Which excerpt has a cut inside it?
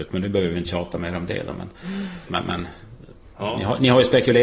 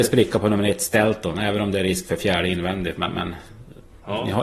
first; 1 cut; at 2.3 s

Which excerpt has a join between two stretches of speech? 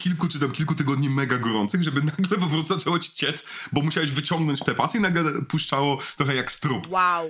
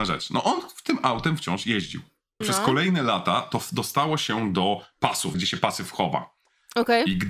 second; 2 cuts; at 2.4 s, 5.3 s

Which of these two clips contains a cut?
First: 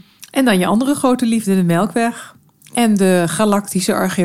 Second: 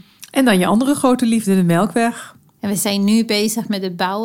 second; 1 cut; at 2.6 s

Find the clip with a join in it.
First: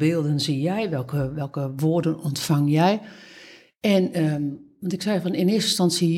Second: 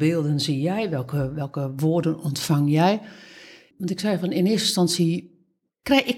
second; 1 cut; at 3.7 s

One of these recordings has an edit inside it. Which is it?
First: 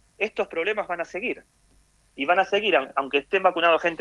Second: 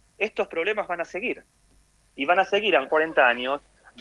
second; 1 cut; at 2.9 s

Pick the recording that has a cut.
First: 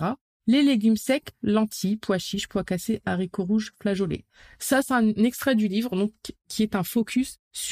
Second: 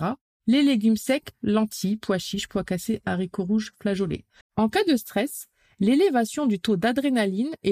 second; 1 cut; at 4.4 s

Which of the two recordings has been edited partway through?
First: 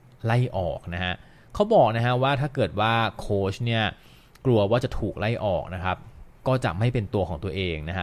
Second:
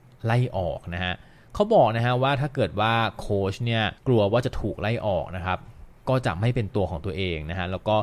second; 1 cut; at 4.0 s

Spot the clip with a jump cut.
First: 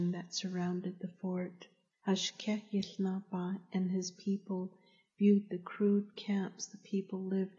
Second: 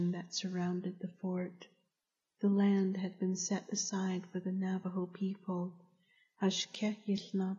first; 1 cut; at 1.9 s

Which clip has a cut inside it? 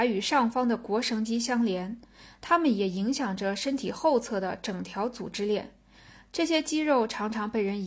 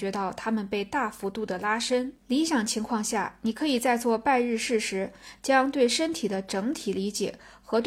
second; 1 cut; at 2.2 s

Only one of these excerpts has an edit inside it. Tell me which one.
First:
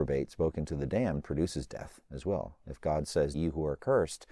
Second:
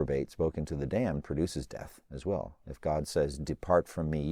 first; 1 cut; at 3.3 s

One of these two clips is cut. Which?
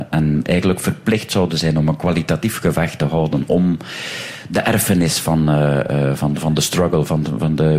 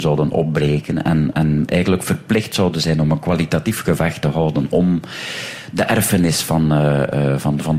second; 1 cut; at 1.3 s

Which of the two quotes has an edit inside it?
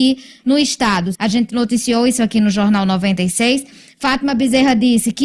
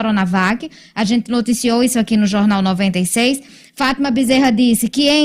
first; 1 cut; at 1.1 s

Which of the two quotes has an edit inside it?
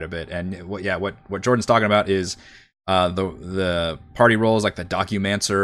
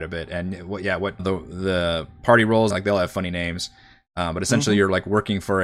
second; 2 cuts; at 1.2 s, 2.7 s

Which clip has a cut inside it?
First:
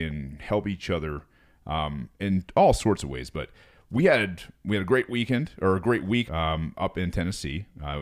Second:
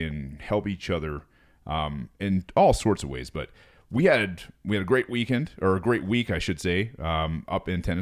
first; 1 cut; at 6.3 s

